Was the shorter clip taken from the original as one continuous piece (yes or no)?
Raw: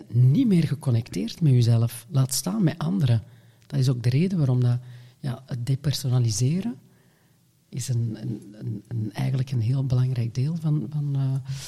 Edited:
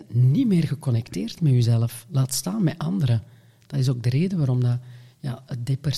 yes